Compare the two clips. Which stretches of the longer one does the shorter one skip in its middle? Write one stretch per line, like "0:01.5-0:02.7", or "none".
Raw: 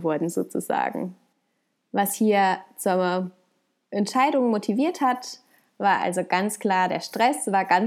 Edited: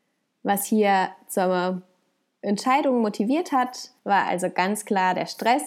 0:05.5-0:05.7